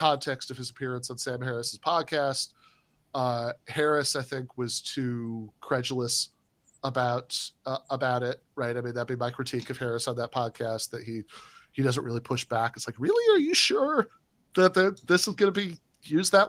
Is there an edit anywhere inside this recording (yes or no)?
no